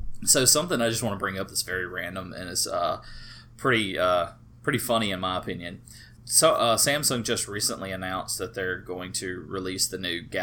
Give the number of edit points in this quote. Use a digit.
1